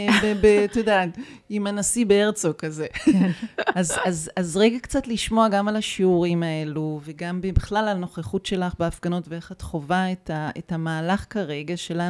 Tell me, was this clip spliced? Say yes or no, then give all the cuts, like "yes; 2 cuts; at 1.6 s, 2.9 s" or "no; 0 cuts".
no; 0 cuts